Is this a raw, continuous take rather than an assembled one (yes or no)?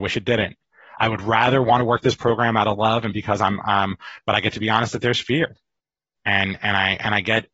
yes